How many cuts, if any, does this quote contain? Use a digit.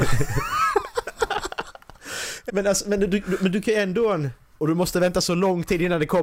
2